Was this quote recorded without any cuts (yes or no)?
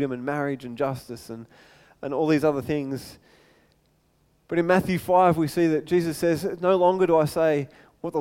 yes